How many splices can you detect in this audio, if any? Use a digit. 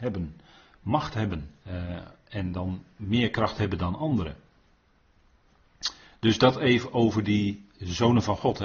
1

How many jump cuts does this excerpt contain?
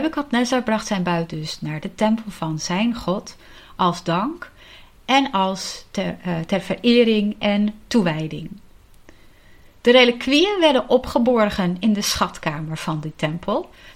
0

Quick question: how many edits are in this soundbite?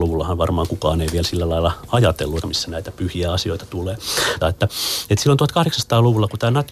2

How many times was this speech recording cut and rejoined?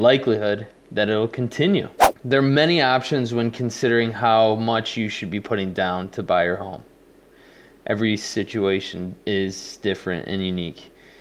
1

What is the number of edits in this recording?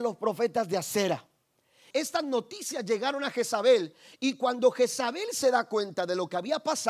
1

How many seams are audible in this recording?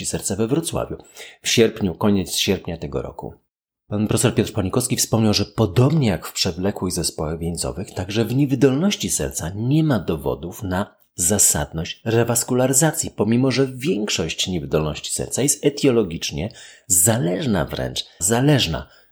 1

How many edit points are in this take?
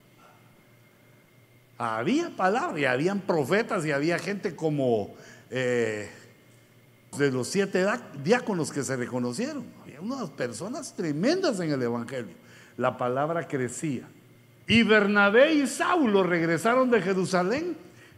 2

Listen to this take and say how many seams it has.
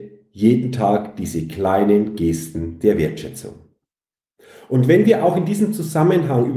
0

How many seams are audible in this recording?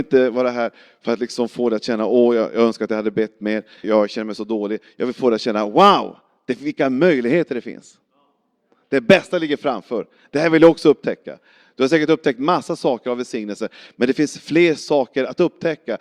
1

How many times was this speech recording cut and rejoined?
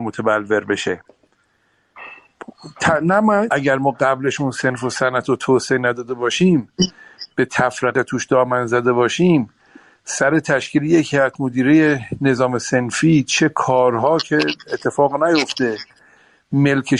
1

